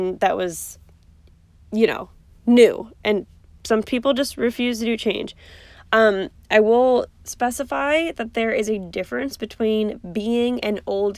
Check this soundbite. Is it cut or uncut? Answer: uncut